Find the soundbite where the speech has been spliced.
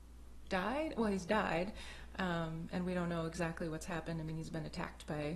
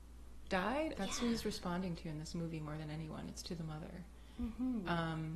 second; 1 cut; at 0.9 s

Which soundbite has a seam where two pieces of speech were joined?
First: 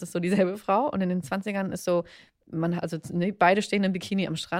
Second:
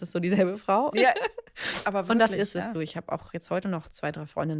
second; 2 cuts; at 0.9 s, 2.7 s

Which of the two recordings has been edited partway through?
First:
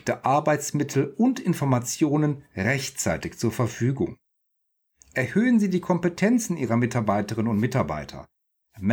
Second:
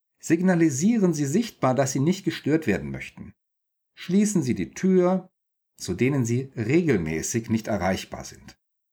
second; 1 cut; at 5.8 s

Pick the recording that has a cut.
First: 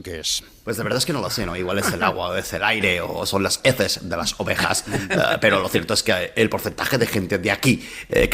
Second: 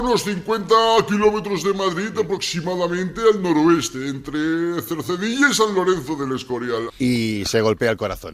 second; 1 cut; at 6.9 s

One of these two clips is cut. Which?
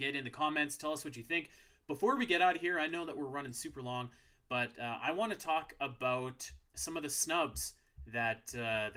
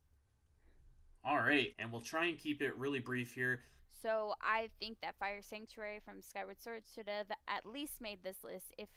second; 2 cuts; at 1.7 s, 3.8 s

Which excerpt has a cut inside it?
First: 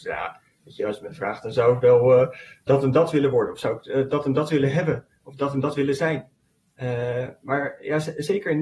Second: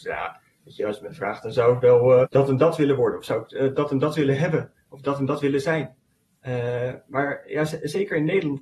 second; 1 cut; at 2.2 s

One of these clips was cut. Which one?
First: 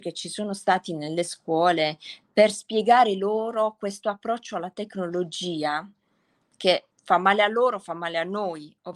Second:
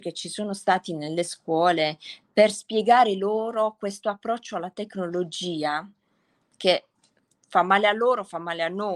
first; 1 cut; at 6.9 s

